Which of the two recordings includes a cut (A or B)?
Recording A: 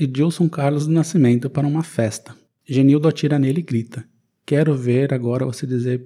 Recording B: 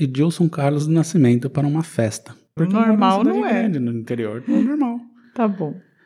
B